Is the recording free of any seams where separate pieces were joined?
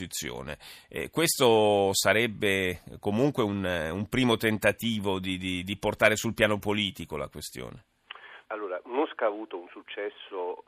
no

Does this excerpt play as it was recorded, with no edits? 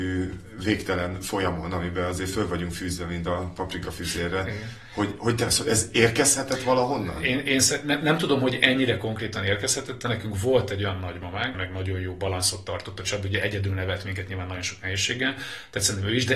no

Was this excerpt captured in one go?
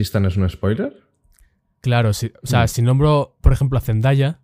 yes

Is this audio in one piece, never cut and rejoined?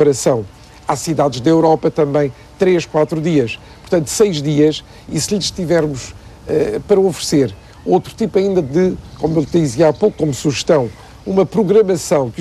yes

